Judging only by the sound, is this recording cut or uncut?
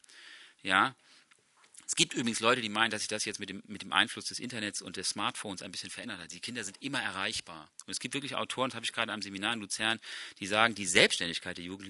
uncut